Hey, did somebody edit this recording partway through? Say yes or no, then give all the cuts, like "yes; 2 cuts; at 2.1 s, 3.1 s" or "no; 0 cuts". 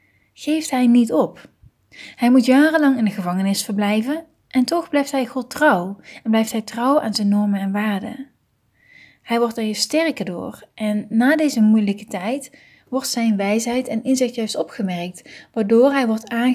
no; 0 cuts